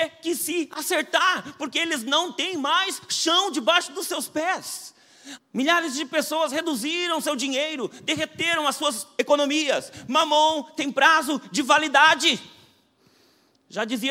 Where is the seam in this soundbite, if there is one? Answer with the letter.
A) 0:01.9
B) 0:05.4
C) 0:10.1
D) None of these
B